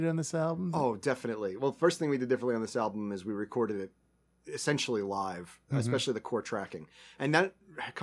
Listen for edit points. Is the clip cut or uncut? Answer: uncut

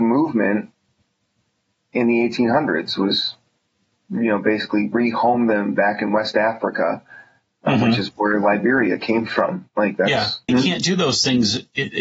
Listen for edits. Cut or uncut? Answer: cut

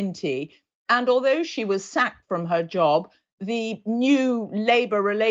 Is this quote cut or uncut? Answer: uncut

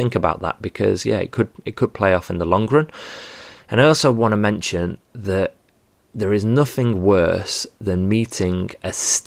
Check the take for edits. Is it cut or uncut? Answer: uncut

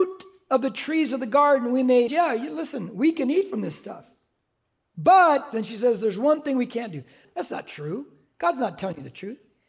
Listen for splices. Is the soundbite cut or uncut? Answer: cut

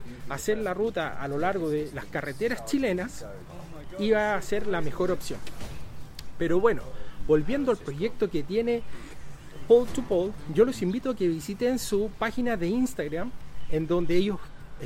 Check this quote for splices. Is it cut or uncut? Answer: uncut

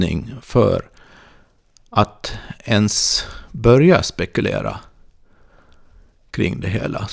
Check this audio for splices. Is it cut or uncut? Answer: uncut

